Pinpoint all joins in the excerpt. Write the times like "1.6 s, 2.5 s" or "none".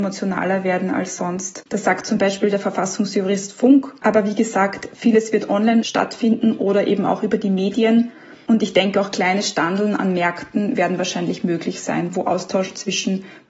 1.7 s